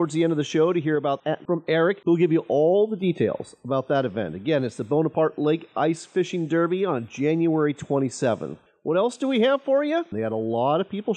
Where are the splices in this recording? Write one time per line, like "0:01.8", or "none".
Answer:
0:10.1